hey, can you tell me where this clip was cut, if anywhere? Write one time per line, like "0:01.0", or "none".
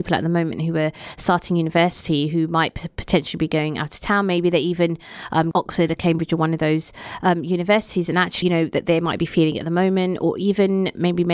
0:05.5
0:08.4